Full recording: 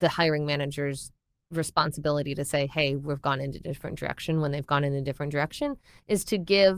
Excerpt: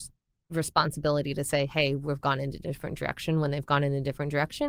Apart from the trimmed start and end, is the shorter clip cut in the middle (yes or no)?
no